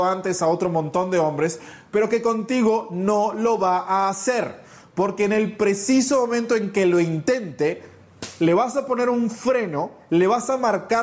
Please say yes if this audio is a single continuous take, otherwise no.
yes